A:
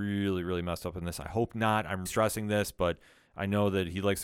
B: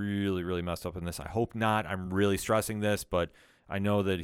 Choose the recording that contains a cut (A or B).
A